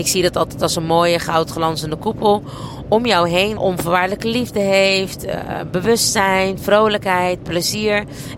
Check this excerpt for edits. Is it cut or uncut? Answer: cut